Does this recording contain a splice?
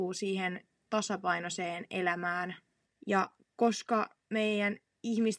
yes; 1 cut; at 2.9 s

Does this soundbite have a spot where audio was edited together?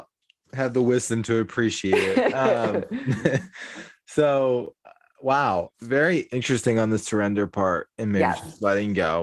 no; 0 cuts

